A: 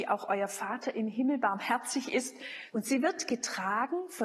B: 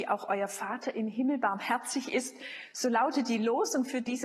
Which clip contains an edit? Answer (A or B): A